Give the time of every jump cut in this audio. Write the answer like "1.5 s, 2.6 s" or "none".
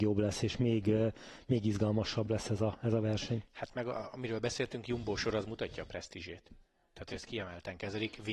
none